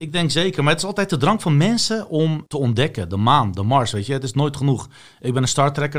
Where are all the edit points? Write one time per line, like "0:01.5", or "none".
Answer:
0:02.5

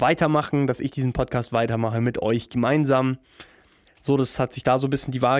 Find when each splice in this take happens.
0:03.9

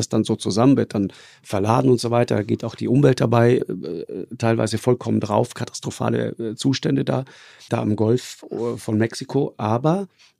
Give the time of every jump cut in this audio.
0:03.6
0:07.7

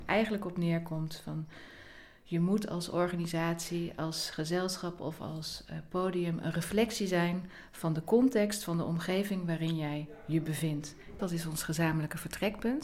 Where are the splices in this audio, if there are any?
0:11.2

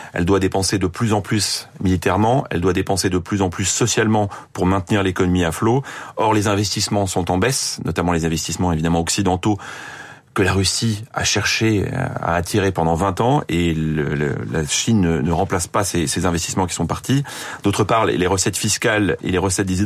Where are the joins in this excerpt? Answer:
none

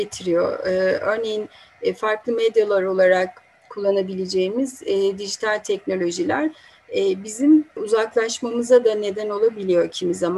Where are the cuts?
0:07.8

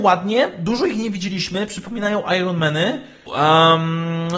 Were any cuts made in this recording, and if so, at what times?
0:03.3

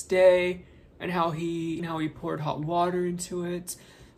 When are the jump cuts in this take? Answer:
0:01.8

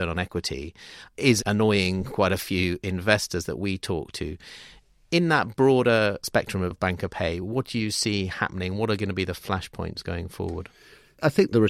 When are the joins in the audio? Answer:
none

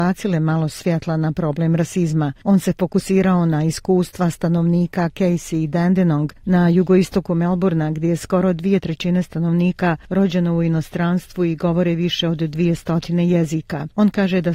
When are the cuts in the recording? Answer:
none

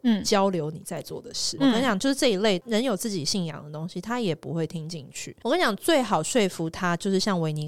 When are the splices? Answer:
0:01.6
0:05.4

